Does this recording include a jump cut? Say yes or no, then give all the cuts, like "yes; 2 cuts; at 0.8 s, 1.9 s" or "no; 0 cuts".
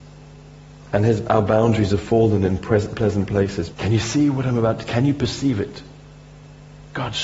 yes; 1 cut; at 3.7 s